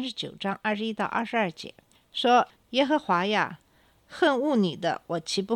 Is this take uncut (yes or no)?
yes